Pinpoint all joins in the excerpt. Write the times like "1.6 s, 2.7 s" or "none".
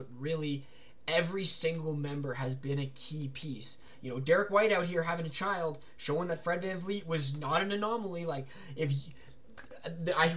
none